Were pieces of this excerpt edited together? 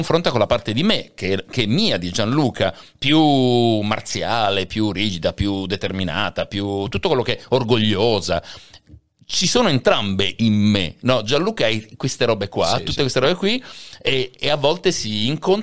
no; 0 cuts

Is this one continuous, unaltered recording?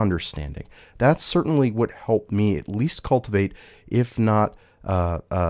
yes; 0 cuts

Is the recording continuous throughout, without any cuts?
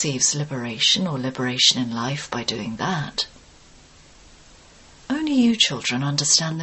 yes; 0 cuts

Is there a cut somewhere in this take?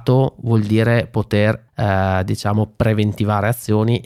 yes; 1 cut; at 1.7 s

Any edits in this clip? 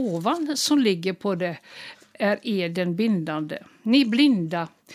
no; 0 cuts

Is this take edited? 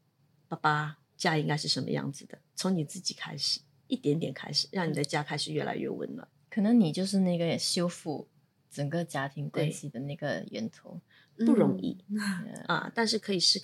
no; 0 cuts

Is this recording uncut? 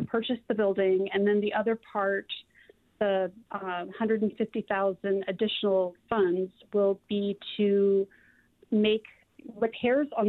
yes; 0 cuts

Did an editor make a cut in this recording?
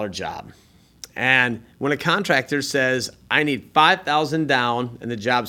no; 0 cuts

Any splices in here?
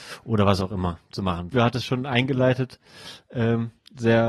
yes; 1 cut; at 1.5 s

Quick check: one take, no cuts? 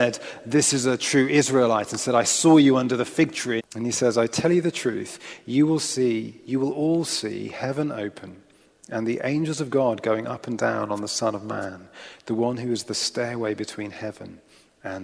no; 1 cut; at 3.6 s

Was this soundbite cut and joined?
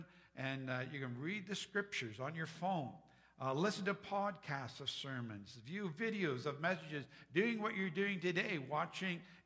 no; 0 cuts

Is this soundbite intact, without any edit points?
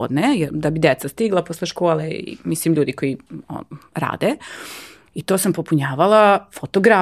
no; 1 cut; at 5.1 s

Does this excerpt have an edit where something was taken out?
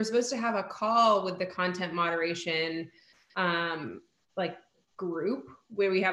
no; 0 cuts

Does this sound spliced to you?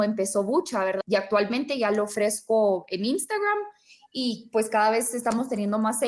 yes; 1 cut; at 1.0 s

